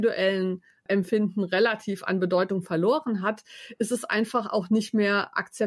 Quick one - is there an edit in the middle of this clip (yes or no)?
no